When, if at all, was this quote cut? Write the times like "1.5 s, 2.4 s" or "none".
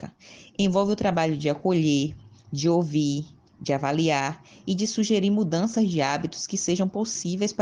none